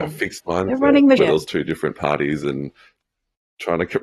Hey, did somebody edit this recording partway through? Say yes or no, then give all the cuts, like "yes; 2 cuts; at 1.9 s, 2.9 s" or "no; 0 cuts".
yes; 1 cut; at 1.2 s